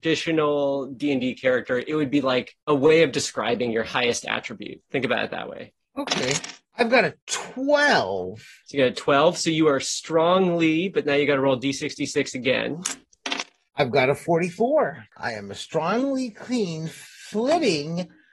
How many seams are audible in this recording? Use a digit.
1